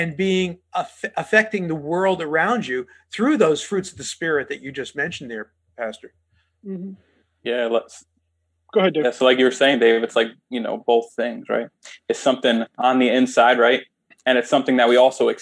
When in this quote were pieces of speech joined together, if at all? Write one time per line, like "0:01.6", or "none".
0:07.4